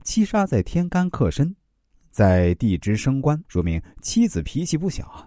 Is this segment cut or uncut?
cut